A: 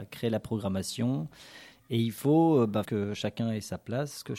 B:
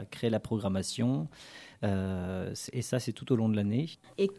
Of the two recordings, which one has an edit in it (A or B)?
A